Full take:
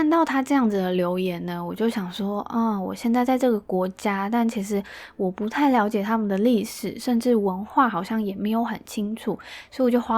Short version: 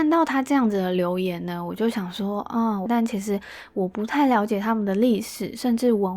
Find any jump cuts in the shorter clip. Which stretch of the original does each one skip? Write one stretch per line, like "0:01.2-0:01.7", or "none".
0:02.9-0:04.3